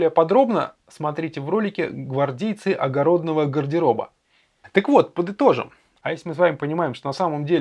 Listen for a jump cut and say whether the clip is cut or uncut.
cut